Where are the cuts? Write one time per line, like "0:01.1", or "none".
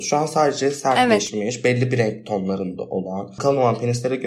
0:03.4